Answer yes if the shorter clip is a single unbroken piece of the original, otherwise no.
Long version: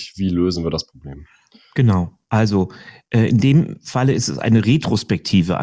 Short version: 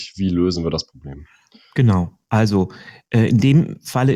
yes